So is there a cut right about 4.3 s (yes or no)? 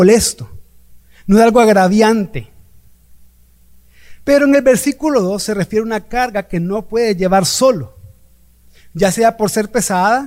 no